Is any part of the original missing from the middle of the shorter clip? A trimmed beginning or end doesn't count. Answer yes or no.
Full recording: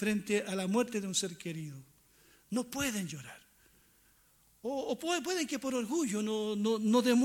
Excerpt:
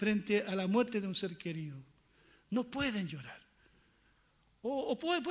no